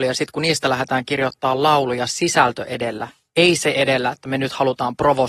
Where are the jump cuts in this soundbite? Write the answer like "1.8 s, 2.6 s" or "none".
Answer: none